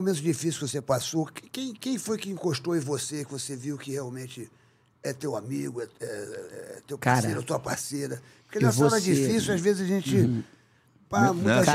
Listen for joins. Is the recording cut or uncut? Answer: uncut